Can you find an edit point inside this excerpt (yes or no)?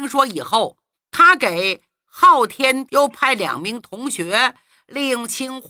yes